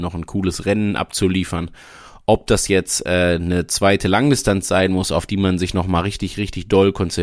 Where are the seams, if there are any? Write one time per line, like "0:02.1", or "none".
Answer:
none